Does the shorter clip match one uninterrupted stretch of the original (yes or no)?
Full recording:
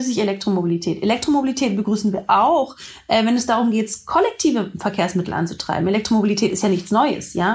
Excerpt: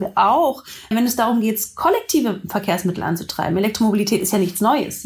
no